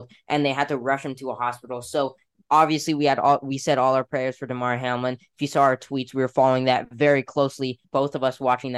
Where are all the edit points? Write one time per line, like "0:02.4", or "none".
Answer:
0:07.8